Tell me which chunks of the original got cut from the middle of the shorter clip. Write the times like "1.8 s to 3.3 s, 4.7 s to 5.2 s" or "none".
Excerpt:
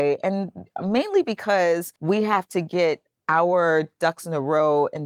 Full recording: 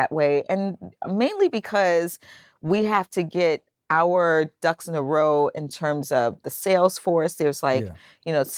2.2 s to 2.6 s